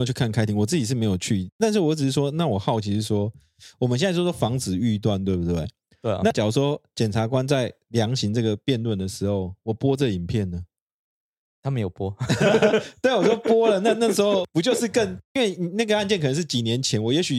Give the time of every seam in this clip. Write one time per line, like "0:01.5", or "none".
none